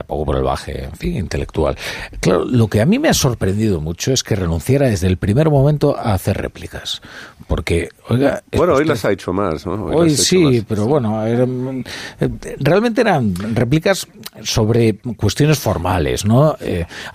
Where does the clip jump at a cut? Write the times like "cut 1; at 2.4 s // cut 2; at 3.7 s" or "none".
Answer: none

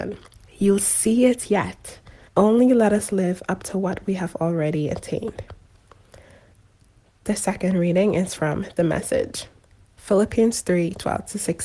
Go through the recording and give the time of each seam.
cut 1; at 2.3 s

